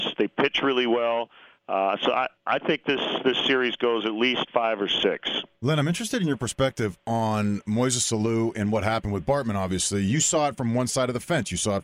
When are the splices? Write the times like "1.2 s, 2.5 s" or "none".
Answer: none